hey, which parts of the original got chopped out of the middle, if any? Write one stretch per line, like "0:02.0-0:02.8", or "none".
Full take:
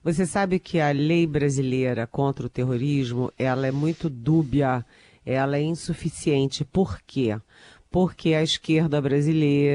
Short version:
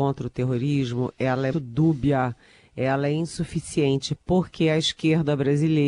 0:03.7-0:04.0
0:06.6-0:07.8